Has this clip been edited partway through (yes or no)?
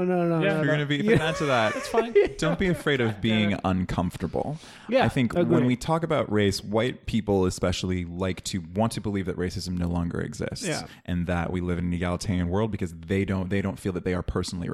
no